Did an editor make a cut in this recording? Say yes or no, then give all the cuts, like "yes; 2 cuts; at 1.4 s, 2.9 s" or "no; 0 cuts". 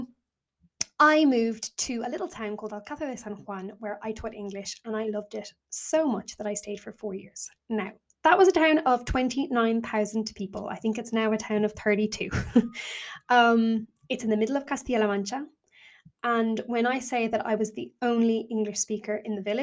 no; 0 cuts